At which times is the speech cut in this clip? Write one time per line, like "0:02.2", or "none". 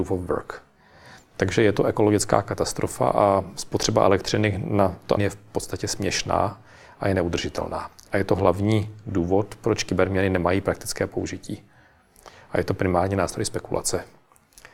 0:05.2